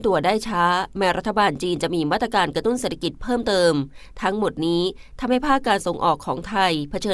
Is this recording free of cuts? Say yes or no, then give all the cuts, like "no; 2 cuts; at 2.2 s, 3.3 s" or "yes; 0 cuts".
yes; 0 cuts